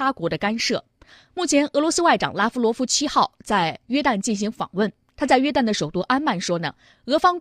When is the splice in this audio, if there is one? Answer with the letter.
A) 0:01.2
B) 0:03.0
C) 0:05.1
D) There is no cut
A